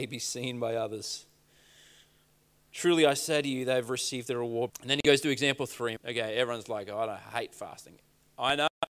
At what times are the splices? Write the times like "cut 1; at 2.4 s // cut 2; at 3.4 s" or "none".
cut 1; at 4.7 s // cut 2; at 6.0 s